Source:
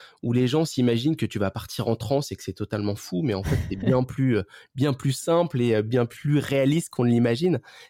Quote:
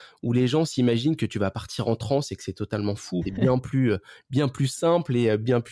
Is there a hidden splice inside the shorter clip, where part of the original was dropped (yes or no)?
yes